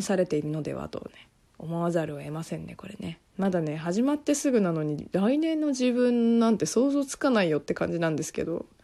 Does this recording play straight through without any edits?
no; 1 cut; at 3.3 s

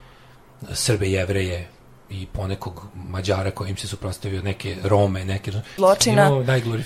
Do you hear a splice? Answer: yes; 1 cut; at 5.8 s

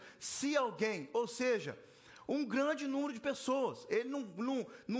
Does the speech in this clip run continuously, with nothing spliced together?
yes; 0 cuts

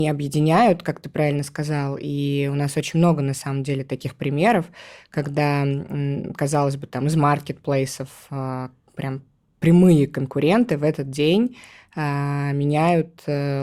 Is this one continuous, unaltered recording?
yes; 0 cuts

